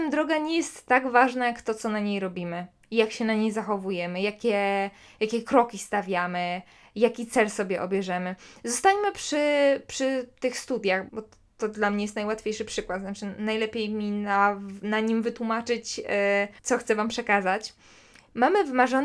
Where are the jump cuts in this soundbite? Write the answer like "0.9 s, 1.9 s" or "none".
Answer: 11.1 s, 16.6 s